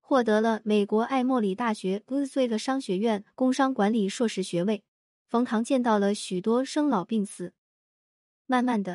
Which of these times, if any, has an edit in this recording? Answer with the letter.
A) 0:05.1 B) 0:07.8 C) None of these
A